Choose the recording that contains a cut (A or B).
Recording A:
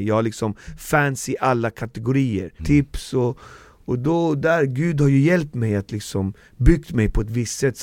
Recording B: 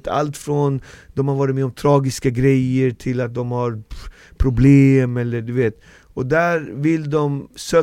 A